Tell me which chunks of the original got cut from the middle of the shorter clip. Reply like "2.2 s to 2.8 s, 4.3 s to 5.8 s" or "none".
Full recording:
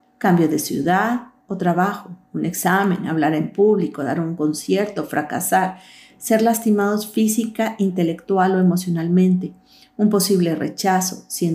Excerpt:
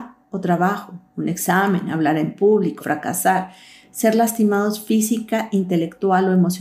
4.0 s to 5.1 s